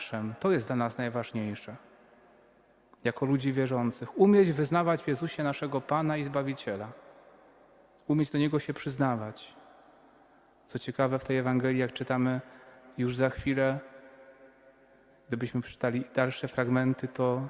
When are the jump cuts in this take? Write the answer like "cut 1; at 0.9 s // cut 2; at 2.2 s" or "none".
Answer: none

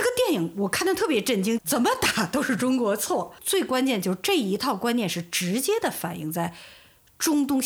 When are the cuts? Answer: cut 1; at 1.6 s

